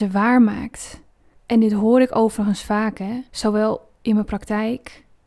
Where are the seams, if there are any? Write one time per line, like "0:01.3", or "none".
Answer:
0:01.3
0:03.3